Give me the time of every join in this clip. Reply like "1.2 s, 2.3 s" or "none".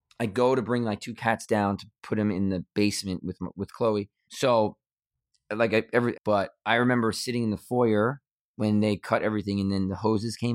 4.2 s, 6.1 s